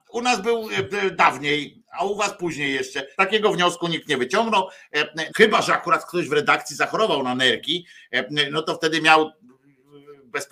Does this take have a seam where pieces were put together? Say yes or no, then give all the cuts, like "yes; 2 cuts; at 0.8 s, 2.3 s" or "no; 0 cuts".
yes; 2 cuts; at 3.1 s, 5.3 s